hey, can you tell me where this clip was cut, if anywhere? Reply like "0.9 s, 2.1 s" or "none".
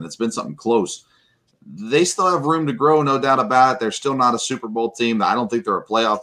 1.5 s